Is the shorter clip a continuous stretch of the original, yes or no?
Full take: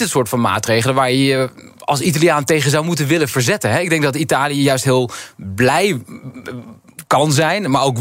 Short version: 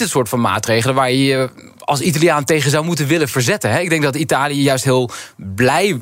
yes